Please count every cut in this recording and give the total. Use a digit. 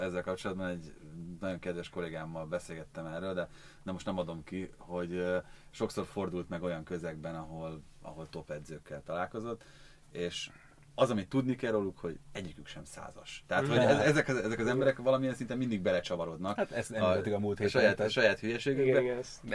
0